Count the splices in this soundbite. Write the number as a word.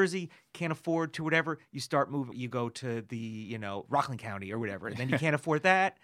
one